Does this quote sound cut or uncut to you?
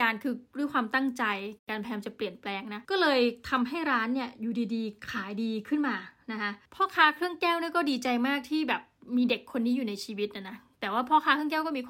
cut